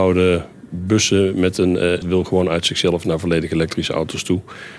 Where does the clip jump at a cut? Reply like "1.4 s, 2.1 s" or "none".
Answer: 2.0 s